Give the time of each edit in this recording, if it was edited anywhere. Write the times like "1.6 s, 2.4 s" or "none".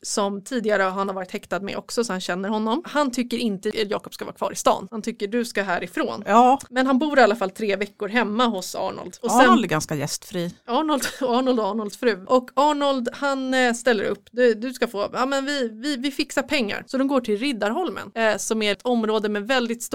none